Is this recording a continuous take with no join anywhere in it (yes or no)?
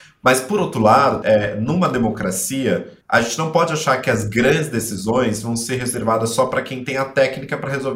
no